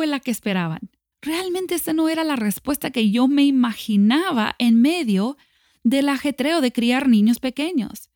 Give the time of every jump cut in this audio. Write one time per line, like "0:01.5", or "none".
0:01.1